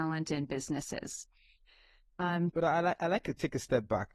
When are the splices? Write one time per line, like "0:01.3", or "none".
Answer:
0:02.5